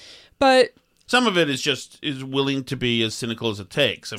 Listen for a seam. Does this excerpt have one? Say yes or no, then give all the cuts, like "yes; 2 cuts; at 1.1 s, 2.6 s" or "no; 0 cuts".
yes; 1 cut; at 1.1 s